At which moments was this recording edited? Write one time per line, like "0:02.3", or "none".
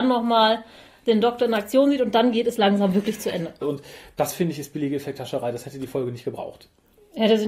0:03.6